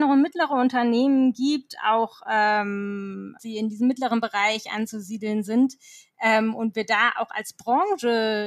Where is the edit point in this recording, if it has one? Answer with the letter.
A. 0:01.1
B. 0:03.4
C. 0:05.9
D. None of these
B